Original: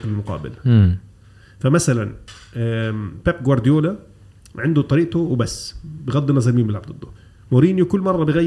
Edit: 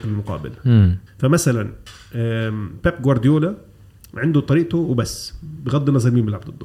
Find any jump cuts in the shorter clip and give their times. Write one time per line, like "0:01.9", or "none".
0:01.1

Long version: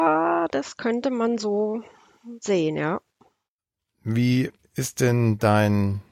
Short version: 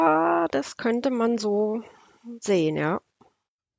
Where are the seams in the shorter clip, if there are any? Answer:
none

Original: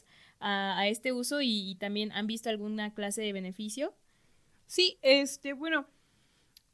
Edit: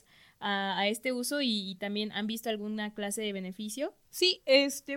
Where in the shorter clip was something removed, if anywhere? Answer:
0:04.0

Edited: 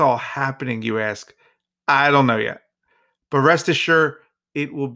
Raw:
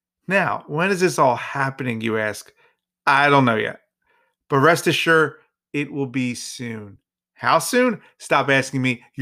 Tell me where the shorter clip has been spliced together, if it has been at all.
none

